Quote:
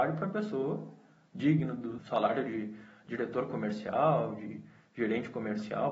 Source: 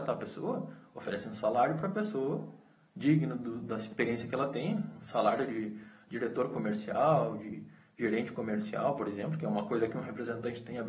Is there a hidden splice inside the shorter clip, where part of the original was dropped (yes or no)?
yes